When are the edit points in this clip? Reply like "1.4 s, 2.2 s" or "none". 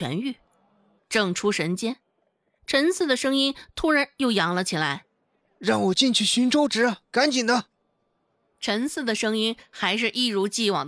1.0 s